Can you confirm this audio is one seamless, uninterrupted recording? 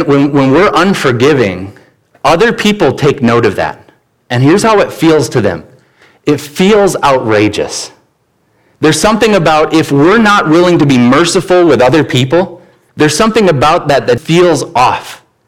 no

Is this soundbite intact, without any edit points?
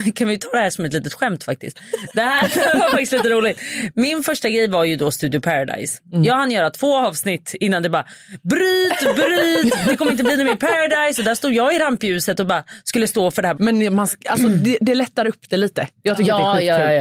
no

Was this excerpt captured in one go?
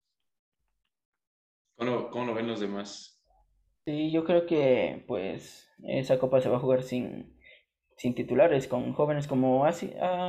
yes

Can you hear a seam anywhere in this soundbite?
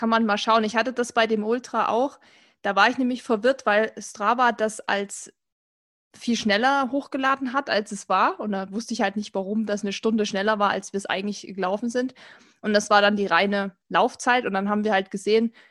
no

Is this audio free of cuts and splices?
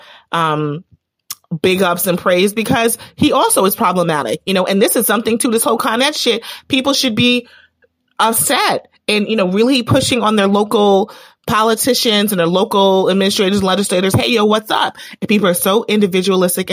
no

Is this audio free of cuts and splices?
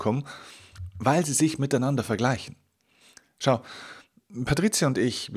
yes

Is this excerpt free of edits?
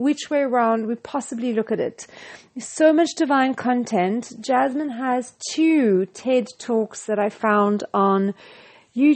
yes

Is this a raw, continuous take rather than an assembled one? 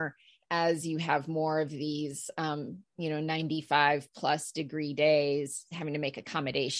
yes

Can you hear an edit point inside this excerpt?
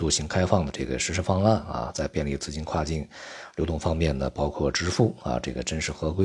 no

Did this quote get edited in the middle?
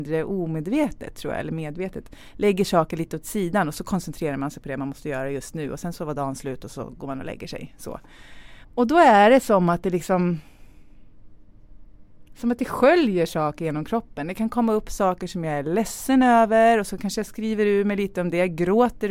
yes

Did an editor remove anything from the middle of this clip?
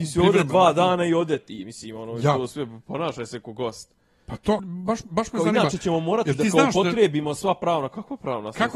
yes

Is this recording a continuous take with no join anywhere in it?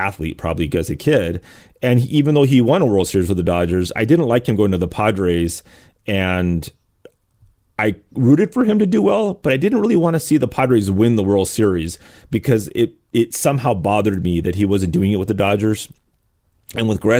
yes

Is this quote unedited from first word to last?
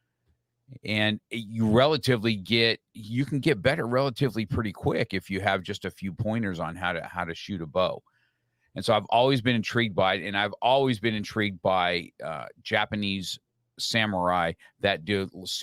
yes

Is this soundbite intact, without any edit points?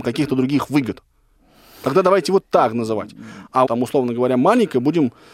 no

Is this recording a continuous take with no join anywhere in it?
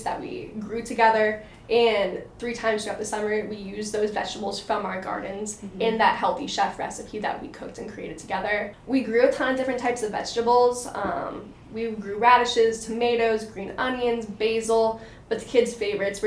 no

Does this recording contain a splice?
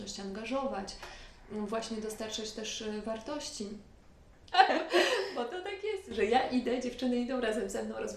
yes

